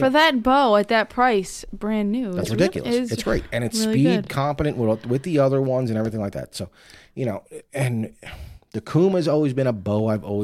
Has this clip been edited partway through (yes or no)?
no